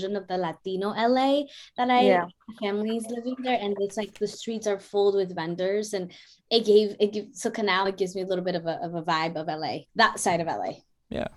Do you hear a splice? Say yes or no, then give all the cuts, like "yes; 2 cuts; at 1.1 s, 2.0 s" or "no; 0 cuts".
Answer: yes; 2 cuts; at 7.9 s, 9.9 s